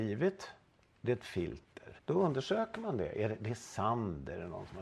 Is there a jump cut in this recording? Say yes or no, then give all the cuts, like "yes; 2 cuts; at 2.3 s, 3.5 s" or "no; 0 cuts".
yes; 1 cut; at 2.0 s